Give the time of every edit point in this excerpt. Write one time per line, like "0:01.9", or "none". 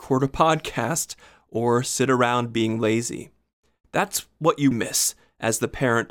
0:04.7